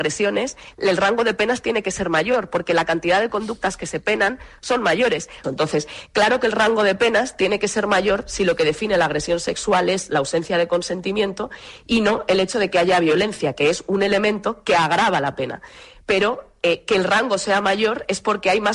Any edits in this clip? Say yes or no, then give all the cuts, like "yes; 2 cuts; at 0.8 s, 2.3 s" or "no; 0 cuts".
yes; 1 cut; at 5.4 s